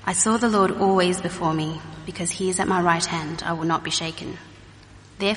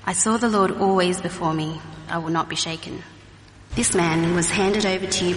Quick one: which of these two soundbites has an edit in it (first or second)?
second